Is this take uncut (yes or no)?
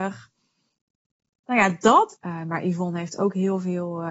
no